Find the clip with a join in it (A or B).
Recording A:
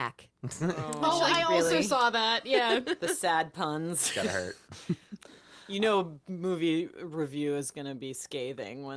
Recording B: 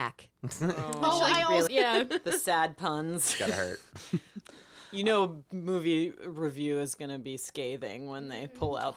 B